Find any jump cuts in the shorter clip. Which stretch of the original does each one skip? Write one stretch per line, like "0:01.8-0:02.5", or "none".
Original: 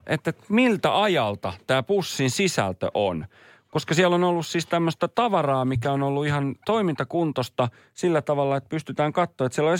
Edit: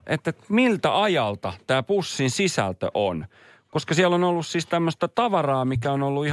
none